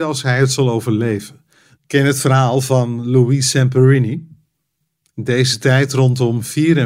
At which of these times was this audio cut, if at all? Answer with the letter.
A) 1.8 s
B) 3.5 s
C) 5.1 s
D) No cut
A